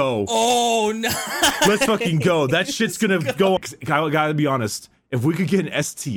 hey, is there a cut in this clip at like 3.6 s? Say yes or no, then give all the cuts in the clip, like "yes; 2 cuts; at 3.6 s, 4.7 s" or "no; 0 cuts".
yes; 1 cut; at 3.6 s